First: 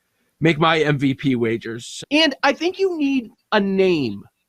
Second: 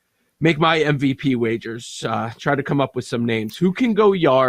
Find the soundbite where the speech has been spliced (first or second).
first